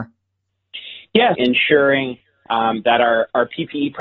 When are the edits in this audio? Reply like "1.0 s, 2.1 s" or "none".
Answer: 1.4 s